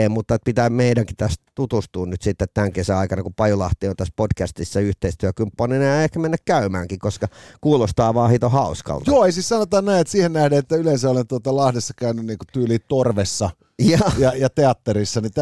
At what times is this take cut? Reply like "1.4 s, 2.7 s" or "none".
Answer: none

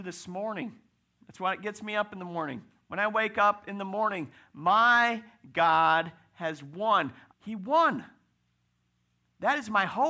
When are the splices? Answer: 1.2 s, 7.3 s

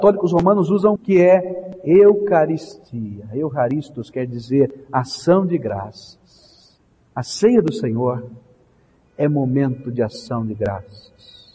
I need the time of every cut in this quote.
1.0 s

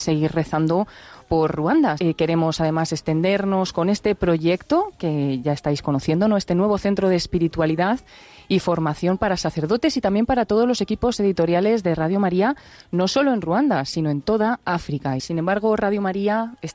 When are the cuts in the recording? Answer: 2.0 s, 15.2 s

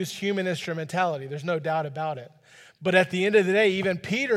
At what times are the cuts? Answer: none

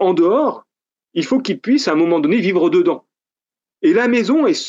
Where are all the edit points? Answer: none

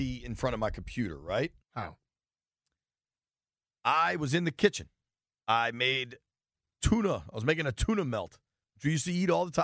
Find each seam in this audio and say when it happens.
1.6 s

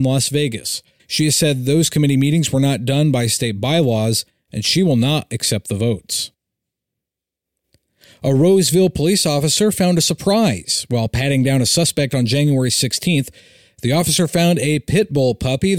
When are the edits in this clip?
1.0 s

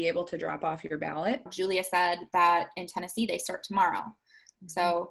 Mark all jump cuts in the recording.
1.5 s

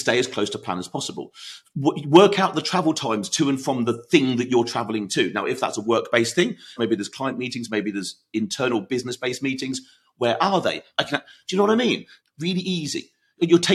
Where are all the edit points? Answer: 6.8 s, 10.9 s, 12.2 s

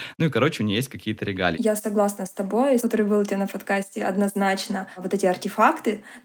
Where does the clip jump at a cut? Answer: 1.5 s, 2.8 s

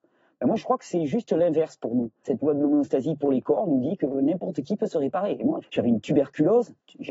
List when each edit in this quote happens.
2.2 s, 5.6 s

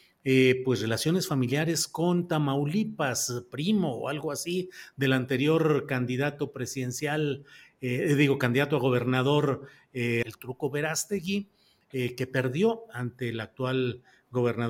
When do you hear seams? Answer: 10.2 s

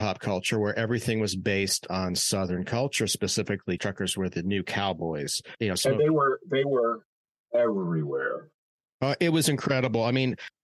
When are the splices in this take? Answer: 3.8 s

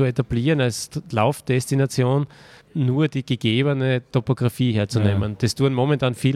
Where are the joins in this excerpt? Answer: 2.6 s

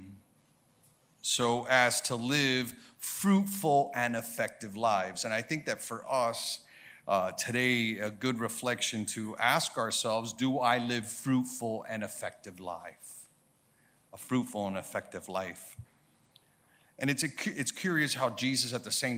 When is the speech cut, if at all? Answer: none

